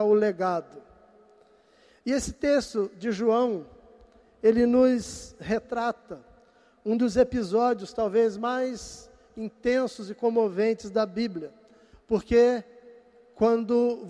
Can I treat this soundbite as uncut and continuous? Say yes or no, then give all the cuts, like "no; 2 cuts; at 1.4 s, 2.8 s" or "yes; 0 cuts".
no; 1 cut; at 11.9 s